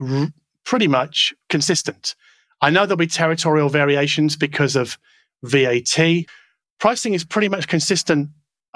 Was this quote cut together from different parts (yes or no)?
no